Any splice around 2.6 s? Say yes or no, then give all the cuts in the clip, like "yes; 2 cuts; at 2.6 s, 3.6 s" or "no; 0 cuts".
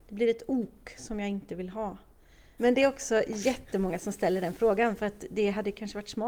yes; 1 cut; at 2.6 s